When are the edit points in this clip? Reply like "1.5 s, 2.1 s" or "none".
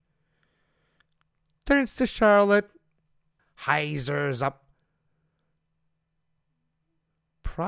3.4 s

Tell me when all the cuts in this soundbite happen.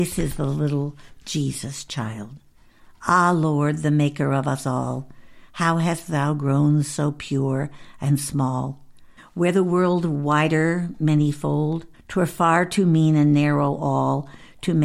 9.2 s, 11.9 s

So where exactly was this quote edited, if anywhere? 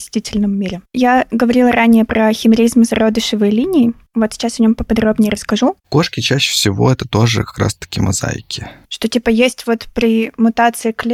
5.8 s, 8.8 s

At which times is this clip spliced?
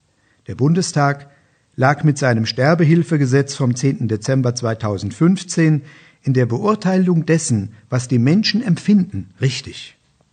none

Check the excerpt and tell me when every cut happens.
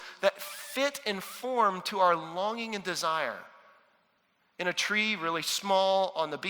none

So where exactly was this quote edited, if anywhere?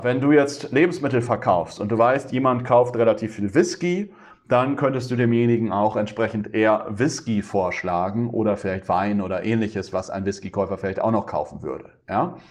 none

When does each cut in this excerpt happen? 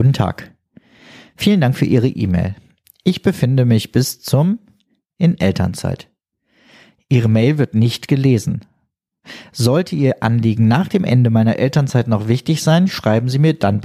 none

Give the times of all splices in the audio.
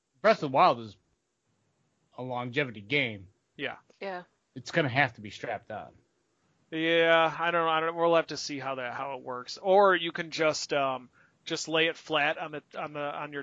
none

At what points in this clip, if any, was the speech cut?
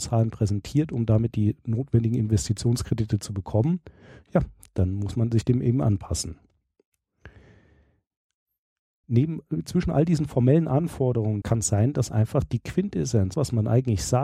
9.0 s, 11.4 s, 13.3 s

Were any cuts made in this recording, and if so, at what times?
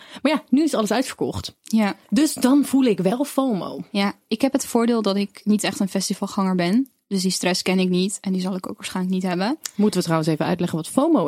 2.0 s

